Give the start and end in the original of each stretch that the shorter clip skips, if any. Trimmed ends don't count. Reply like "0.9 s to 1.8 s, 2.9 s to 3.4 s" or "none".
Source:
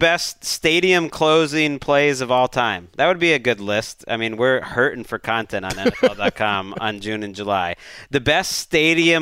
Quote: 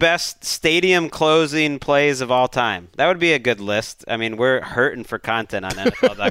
none